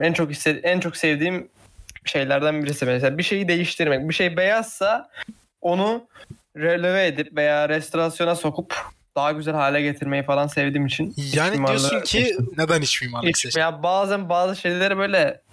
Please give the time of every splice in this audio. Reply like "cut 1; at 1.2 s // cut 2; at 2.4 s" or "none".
cut 1; at 12.5 s // cut 2; at 13.5 s